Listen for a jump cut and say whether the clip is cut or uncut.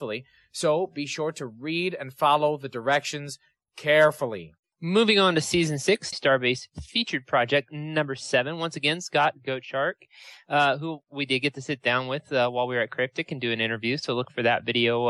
cut